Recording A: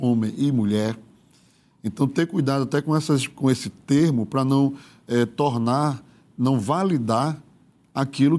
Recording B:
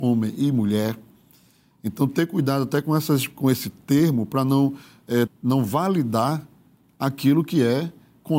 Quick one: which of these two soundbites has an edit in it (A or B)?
B